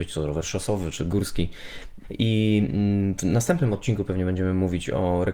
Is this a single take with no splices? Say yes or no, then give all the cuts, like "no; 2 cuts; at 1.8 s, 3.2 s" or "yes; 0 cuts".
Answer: no; 1 cut; at 2.0 s